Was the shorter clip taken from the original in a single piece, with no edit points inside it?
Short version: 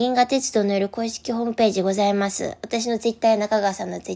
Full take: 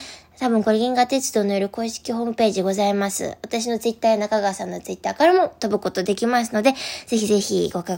yes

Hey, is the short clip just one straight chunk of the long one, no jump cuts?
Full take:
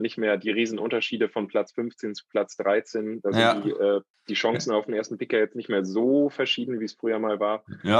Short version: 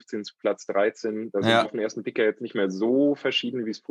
no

